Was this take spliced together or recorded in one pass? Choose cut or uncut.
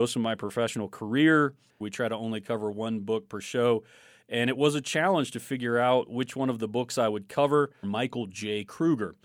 cut